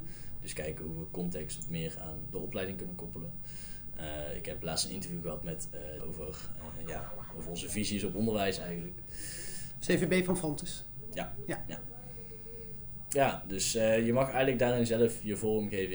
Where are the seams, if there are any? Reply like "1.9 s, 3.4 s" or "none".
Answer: 6.0 s